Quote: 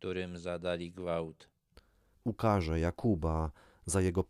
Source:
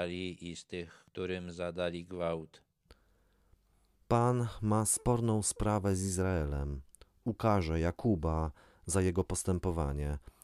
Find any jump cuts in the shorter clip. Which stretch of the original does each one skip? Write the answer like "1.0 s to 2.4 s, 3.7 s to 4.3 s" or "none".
3.3 s to 7.1 s